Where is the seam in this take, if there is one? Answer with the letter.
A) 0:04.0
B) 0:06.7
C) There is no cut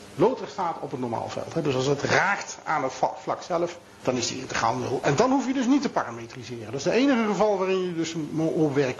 A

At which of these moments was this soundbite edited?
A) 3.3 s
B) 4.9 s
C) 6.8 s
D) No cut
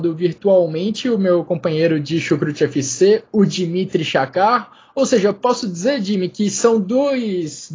D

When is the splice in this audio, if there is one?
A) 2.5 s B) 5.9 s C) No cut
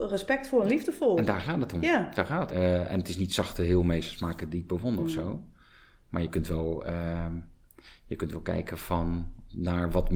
A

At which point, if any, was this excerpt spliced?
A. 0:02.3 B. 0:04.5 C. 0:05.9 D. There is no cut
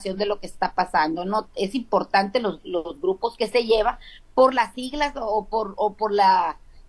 D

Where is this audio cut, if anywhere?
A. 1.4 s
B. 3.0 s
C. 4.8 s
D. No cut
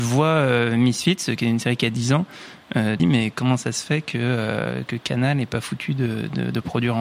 B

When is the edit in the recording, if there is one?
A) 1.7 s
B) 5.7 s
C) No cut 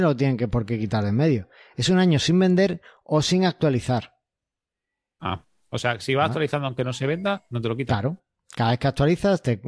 C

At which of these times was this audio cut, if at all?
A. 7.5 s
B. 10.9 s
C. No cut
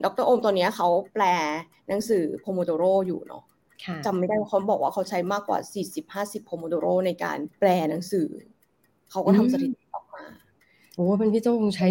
A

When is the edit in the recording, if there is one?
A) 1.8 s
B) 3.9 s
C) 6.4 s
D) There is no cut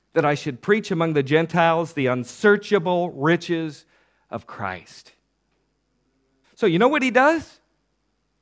C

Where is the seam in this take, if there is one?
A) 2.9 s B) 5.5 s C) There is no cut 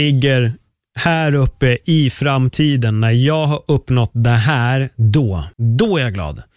B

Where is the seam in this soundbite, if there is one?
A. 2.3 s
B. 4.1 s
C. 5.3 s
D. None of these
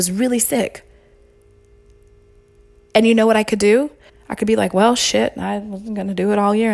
B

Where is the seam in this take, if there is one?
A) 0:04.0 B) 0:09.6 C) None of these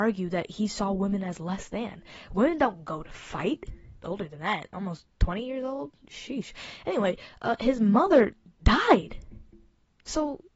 A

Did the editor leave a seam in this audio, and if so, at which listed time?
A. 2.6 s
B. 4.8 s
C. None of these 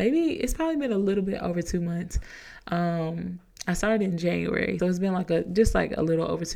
B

